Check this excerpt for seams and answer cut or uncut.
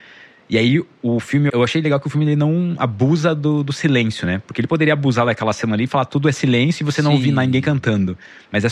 cut